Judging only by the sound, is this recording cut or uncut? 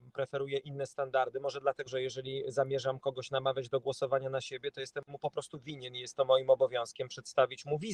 cut